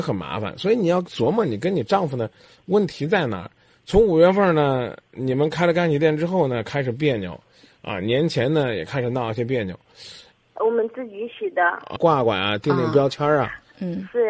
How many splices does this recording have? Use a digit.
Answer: 1